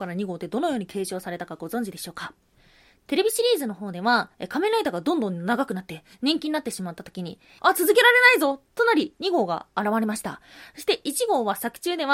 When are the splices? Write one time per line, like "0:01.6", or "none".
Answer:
0:07.6